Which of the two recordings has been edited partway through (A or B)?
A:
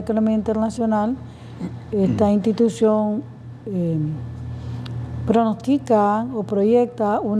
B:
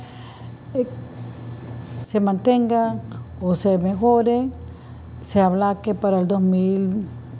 B